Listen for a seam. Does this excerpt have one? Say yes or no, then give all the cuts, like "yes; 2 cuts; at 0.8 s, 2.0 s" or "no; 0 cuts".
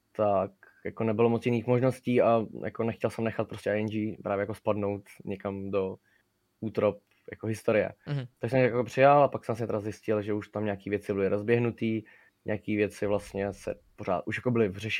no; 0 cuts